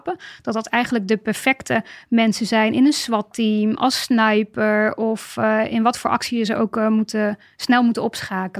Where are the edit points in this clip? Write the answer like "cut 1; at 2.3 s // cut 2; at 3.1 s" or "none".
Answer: none

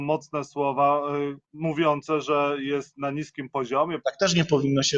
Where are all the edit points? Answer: cut 1; at 1.4 s // cut 2; at 4.0 s

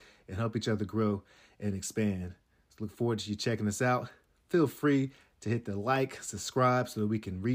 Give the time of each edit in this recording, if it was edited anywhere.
none

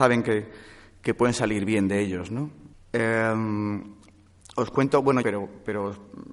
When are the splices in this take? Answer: cut 1; at 2.7 s // cut 2; at 5.2 s

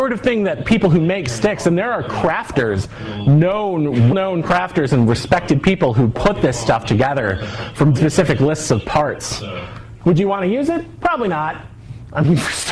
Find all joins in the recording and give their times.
cut 1; at 4.1 s // cut 2; at 7.9 s // cut 3; at 10.0 s

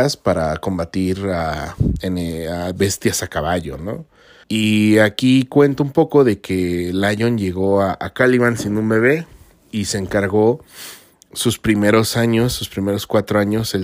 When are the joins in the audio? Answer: cut 1; at 4.4 s

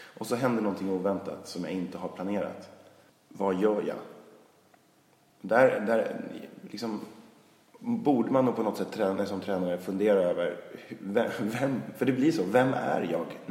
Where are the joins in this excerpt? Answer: none

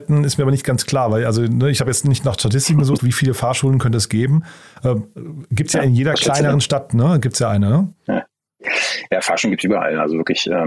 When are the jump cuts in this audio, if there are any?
cut 1; at 3.0 s

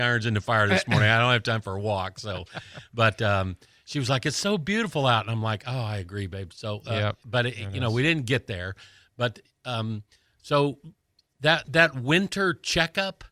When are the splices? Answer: none

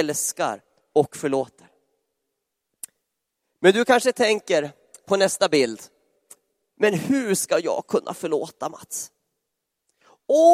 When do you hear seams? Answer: none

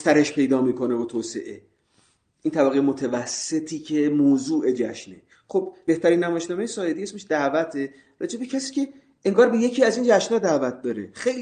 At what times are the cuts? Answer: none

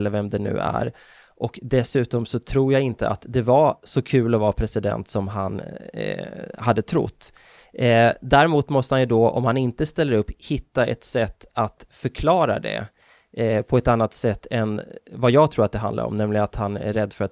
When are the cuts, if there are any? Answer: none

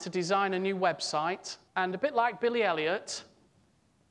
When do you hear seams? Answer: cut 1; at 1.7 s

